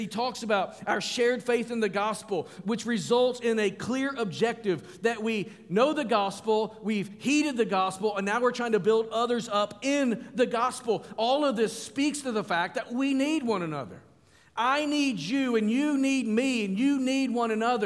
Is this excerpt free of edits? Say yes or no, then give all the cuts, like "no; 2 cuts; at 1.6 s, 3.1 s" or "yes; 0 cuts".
yes; 0 cuts